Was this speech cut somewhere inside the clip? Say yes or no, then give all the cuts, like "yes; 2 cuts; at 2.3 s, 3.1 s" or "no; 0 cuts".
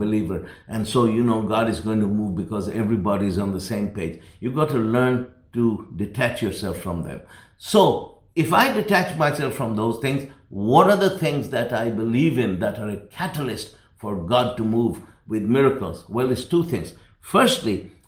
no; 0 cuts